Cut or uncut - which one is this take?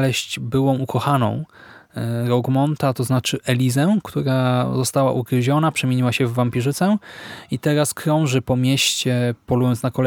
uncut